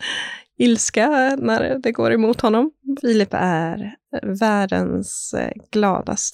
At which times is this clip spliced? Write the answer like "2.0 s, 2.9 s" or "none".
3.0 s